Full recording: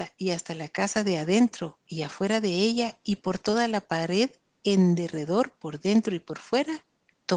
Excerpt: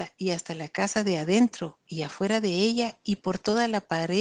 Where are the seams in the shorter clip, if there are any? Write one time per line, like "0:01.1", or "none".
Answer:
none